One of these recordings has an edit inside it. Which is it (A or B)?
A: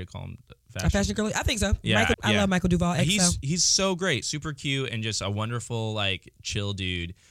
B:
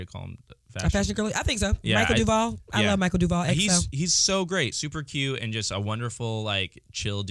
A